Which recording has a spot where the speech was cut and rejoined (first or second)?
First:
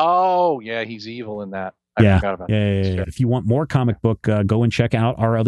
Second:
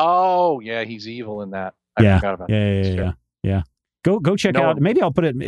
first